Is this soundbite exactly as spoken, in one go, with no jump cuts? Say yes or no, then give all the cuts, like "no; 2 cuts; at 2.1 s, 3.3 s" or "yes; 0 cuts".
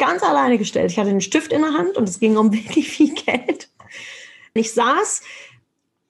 no; 1 cut; at 4.6 s